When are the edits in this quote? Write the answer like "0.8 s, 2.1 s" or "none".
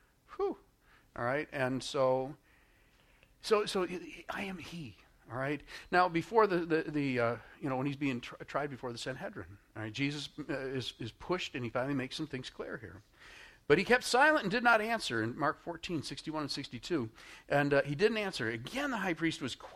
none

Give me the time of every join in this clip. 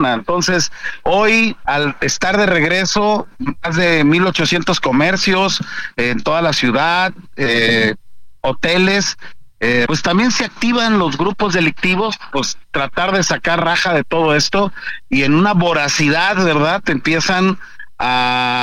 1.7 s, 9.9 s

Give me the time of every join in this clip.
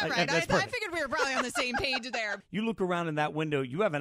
2.4 s

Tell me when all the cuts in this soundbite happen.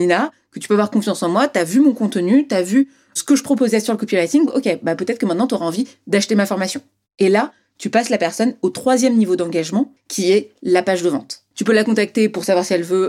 11.5 s

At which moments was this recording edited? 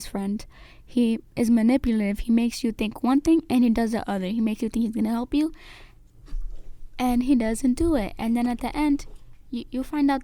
1.3 s

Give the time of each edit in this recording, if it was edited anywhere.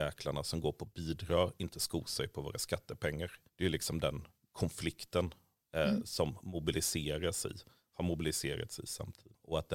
3.5 s

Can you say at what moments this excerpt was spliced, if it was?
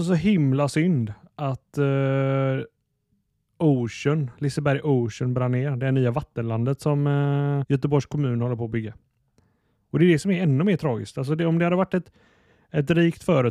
7.6 s

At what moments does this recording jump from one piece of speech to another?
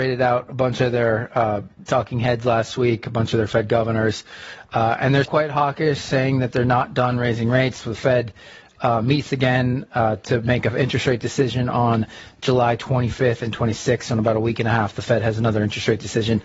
5.3 s

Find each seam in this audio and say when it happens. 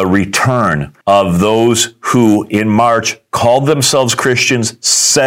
1.0 s

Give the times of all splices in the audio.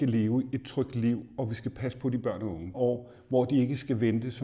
2.7 s

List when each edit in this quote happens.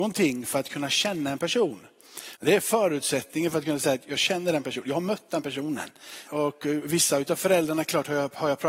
2.4 s, 6.3 s

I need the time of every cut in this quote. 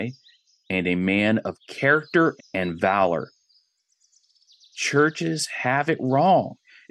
2.4 s

